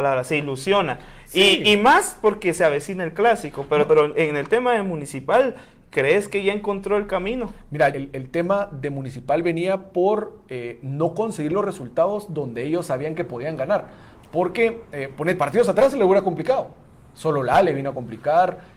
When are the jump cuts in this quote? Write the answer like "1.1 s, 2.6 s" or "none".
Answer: 3.9 s, 7.9 s, 15.4 s